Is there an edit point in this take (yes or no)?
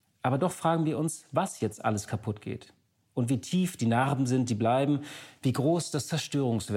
no